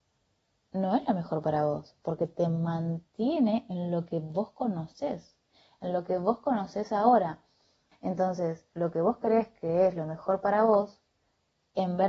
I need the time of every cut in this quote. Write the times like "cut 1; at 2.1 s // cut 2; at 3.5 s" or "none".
cut 1; at 7.9 s